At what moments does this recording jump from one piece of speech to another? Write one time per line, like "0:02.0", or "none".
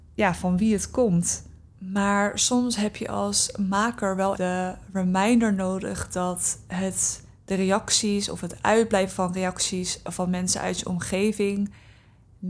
0:01.7
0:04.4

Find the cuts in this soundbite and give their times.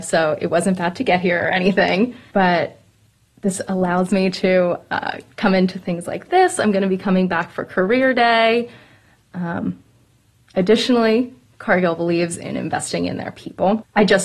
none

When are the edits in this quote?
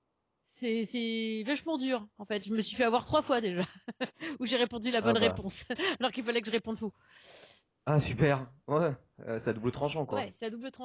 none

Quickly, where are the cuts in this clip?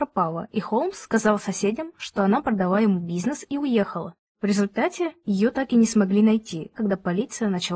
0:04.3
0:06.7

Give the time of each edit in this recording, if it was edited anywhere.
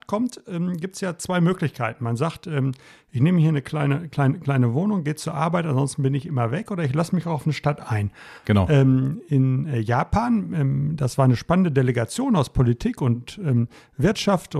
0:08.4

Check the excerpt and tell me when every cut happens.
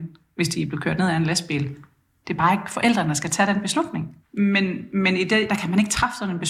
0:02.2
0:04.2
0:05.5

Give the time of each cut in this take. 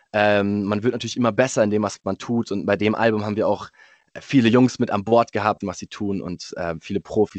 0:05.6

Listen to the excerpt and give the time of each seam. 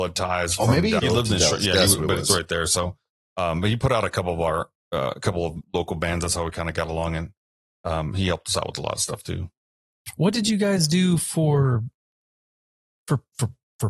0:01.0

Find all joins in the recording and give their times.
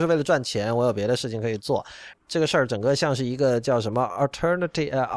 0:02.1

